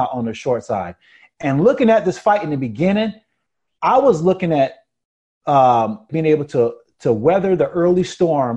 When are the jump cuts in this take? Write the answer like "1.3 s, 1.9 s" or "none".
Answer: 6.1 s